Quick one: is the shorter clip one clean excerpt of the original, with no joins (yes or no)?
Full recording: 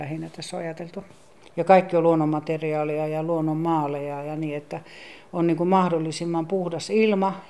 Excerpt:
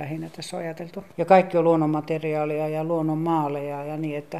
no